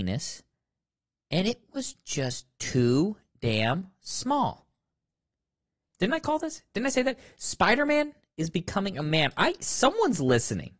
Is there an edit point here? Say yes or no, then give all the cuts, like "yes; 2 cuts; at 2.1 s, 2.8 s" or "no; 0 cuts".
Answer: yes; 1 cut; at 5.9 s